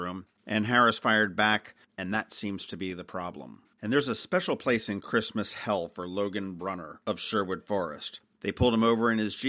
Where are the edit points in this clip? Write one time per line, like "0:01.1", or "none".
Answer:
0:01.9
0:03.7
0:08.4